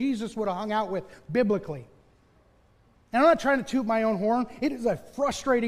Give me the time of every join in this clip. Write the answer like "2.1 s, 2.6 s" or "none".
none